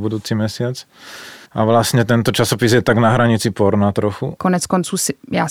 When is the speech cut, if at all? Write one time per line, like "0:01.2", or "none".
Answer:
0:01.4
0:04.4